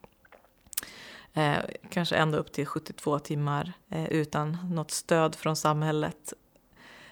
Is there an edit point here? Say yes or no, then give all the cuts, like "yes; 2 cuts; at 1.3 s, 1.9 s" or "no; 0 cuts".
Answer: yes; 1 cut; at 3.8 s